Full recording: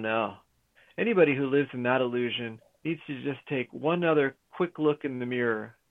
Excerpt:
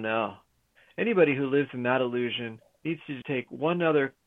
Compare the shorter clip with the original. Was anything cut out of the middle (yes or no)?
yes